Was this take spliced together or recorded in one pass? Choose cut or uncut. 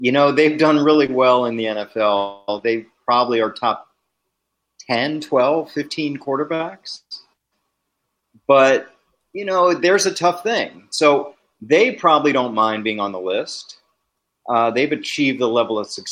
uncut